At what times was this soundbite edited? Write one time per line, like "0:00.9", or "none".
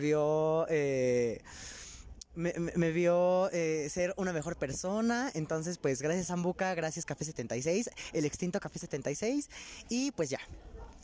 none

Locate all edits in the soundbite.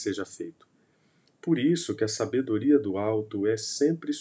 none

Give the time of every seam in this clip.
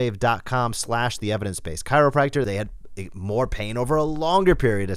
0:02.4

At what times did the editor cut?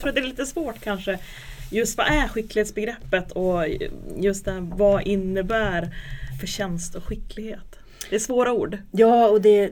none

